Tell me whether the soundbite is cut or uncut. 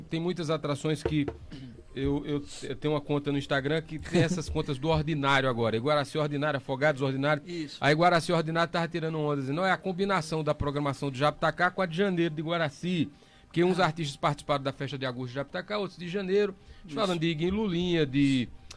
uncut